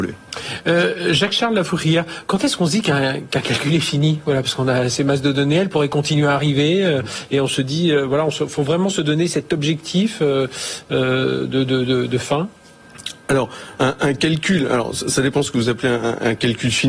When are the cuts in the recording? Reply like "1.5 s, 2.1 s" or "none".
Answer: none